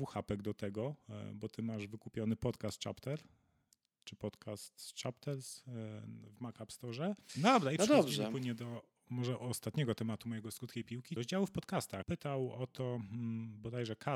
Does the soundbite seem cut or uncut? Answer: cut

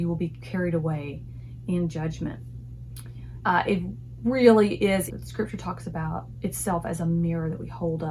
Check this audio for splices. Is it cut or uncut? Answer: cut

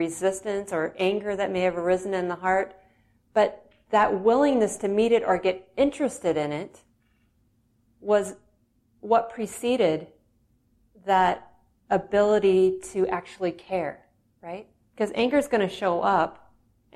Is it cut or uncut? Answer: cut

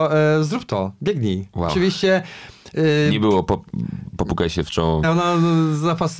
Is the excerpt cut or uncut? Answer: cut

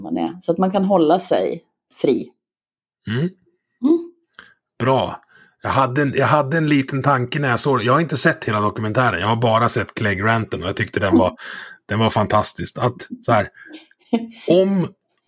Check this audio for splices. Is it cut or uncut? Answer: uncut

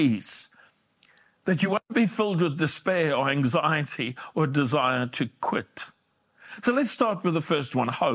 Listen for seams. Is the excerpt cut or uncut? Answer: uncut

